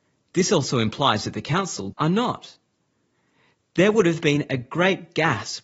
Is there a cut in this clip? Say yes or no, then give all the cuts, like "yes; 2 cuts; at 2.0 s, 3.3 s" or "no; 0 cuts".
yes; 1 cut; at 1.9 s